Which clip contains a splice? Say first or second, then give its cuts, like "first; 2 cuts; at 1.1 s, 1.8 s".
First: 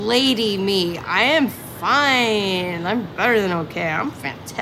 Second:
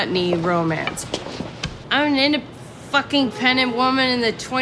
second; 1 cut; at 1.8 s